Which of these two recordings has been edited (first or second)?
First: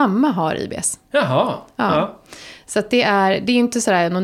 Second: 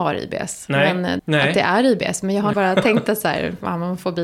second